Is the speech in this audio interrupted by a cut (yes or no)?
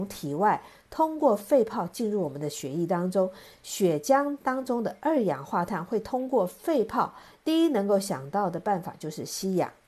yes